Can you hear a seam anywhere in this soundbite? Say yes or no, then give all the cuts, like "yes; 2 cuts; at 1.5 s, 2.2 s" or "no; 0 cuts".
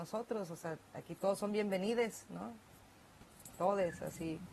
no; 0 cuts